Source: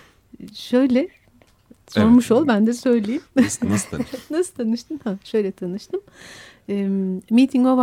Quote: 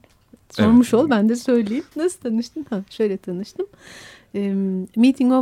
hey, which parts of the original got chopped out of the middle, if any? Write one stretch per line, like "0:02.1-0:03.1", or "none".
0:03.3-0:04.3